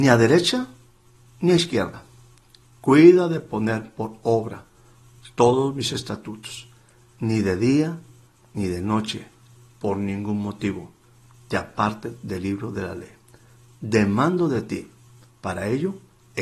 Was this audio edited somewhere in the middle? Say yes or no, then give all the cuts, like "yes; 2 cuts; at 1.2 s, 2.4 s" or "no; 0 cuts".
yes; 1 cut; at 9.7 s